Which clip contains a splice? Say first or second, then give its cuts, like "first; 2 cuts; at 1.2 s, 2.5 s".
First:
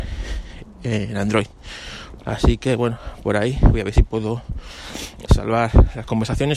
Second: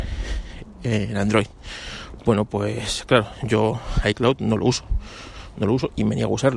first; 2 cuts; at 2.2 s, 5.3 s